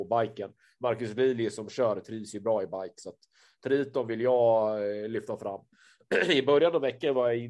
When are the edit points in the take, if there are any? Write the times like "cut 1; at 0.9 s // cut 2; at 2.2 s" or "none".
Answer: none